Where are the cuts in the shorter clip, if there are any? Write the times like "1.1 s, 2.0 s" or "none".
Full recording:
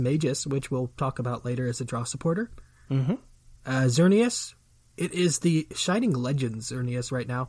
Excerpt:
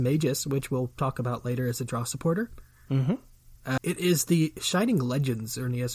3.8 s